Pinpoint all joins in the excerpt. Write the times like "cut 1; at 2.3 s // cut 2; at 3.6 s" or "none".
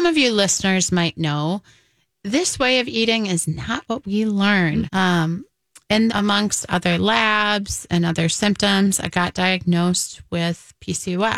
cut 1; at 4.9 s // cut 2; at 6.1 s